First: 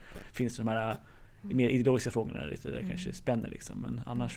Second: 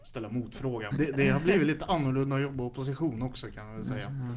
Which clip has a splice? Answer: second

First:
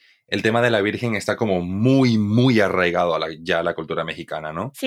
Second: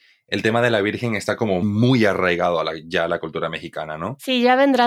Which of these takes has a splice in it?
second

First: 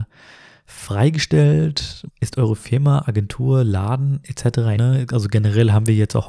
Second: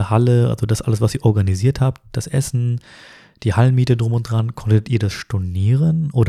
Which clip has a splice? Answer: first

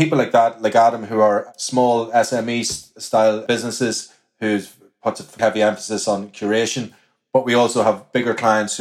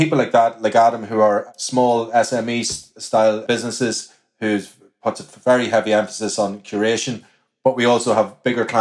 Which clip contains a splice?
first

